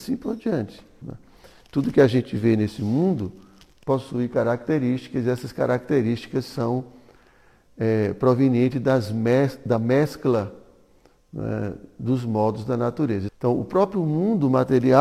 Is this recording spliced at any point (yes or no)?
yes